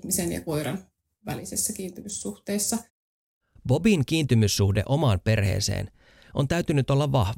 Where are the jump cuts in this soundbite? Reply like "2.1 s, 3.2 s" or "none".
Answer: 3.6 s